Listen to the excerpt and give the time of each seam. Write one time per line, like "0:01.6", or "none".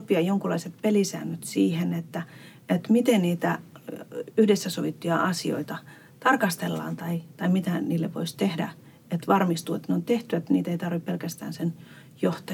none